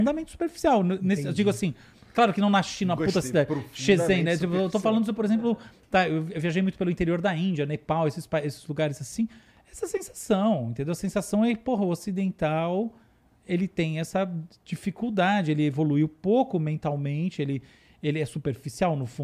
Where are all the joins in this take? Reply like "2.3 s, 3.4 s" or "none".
none